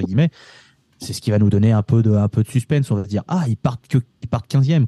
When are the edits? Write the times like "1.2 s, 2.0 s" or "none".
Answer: none